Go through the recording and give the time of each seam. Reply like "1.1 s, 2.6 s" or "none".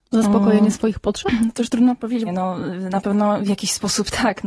2.3 s